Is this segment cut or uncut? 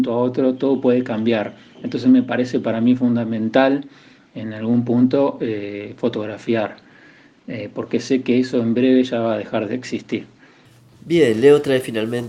uncut